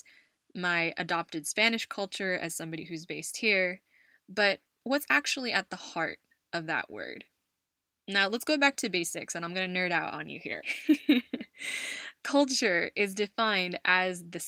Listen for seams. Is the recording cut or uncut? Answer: cut